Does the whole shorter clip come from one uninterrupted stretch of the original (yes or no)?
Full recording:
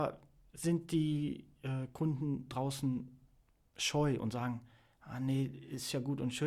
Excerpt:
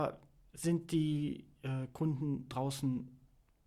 yes